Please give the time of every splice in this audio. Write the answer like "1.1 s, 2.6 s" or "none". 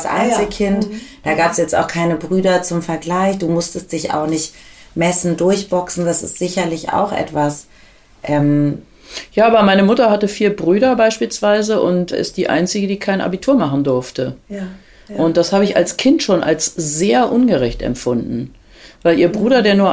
12.1 s